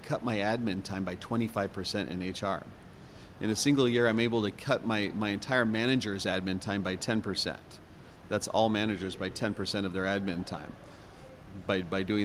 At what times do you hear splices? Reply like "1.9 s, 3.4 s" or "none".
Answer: none